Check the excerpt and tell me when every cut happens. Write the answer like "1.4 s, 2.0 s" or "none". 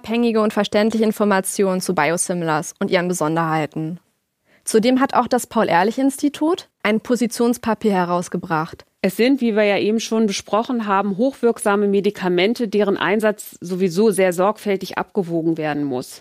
6.8 s, 9.0 s